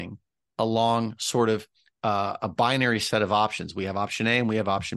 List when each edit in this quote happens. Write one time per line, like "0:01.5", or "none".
none